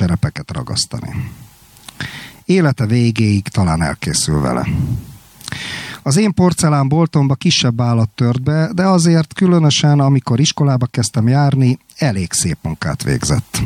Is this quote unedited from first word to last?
yes; 0 cuts

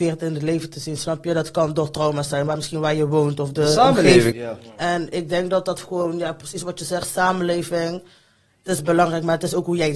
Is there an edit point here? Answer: yes; 2 cuts; at 2.5 s, 4.3 s

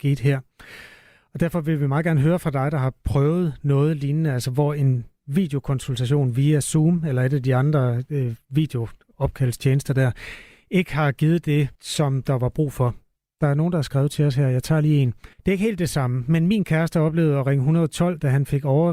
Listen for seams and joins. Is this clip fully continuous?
no; 2 cuts; at 11.7 s, 15.3 s

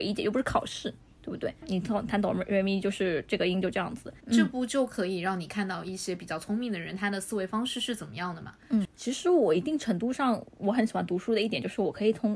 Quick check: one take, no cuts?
no; 3 cuts; at 1.6 s, 4.2 s, 8.9 s

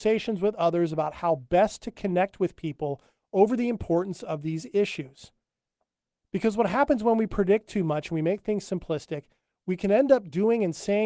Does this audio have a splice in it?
no; 0 cuts

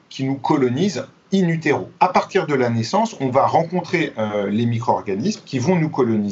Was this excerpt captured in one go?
no; 1 cut; at 2.0 s

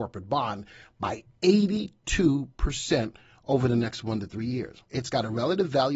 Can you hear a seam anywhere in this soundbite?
yes; 1 cut; at 4.8 s

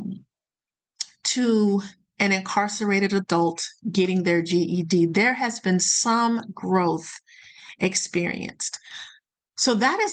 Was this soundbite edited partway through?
no; 0 cuts

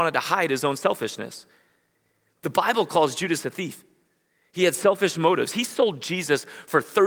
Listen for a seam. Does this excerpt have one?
no; 0 cuts

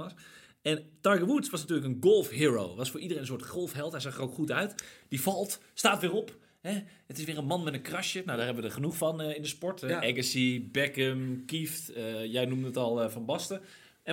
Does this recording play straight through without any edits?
yes; 0 cuts

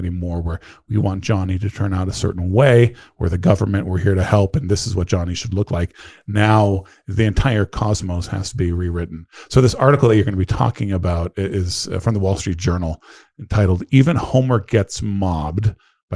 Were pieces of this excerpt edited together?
no; 0 cuts

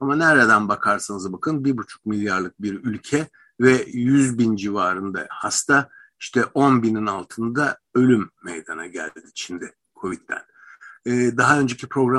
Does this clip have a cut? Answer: no; 0 cuts

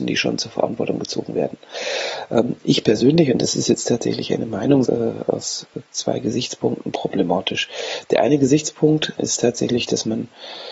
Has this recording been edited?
yes; 2 cuts; at 4.9 s, 9.2 s

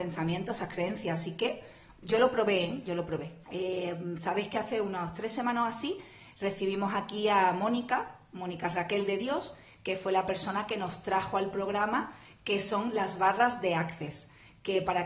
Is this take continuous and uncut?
no; 1 cut; at 3.4 s

